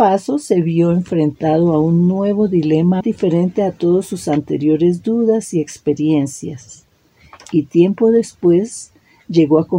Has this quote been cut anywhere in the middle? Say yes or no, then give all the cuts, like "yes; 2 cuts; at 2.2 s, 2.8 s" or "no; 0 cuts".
yes; 1 cut; at 3.0 s